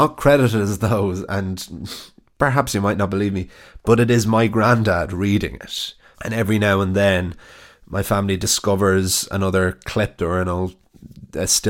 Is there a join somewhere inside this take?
yes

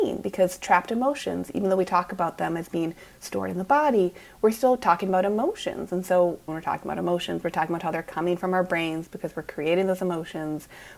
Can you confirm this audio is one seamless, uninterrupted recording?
no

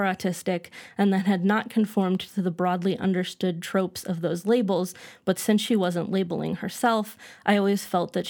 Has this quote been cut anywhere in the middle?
no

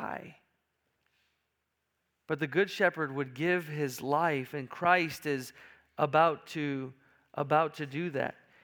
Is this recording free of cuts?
yes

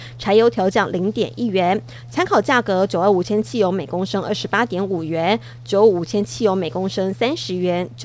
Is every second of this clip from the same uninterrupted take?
yes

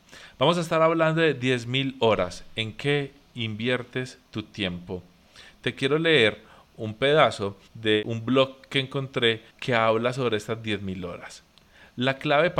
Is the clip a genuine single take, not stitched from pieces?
no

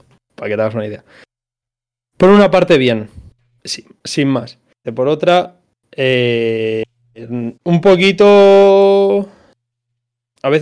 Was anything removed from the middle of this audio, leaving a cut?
yes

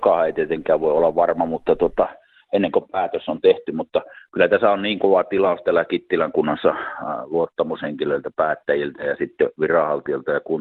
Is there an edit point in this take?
no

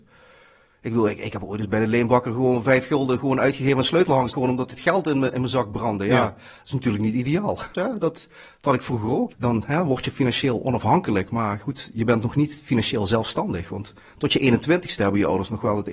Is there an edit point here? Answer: yes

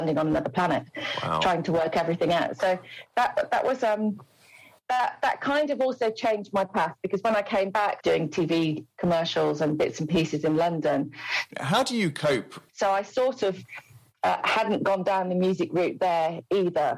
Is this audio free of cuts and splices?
no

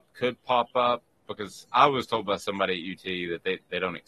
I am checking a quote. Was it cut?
no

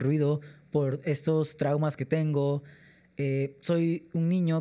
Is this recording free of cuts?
yes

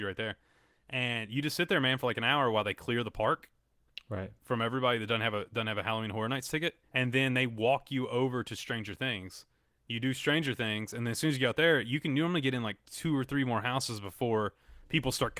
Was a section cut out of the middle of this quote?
yes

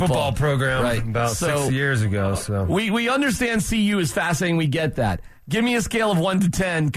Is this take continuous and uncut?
yes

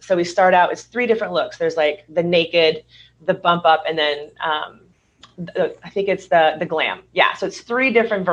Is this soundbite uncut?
yes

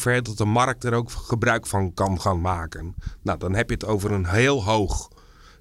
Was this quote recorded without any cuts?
yes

